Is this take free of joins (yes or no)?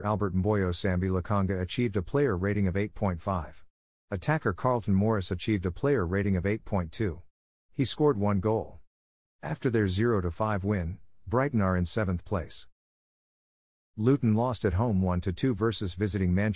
no